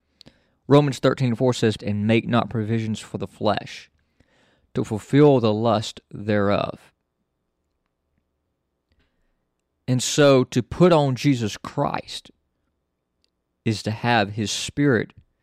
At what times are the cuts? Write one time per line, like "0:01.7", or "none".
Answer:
0:01.8